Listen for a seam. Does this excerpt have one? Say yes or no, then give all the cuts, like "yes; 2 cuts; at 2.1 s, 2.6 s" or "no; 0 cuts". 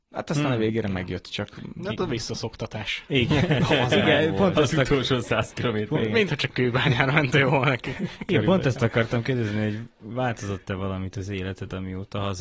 no; 0 cuts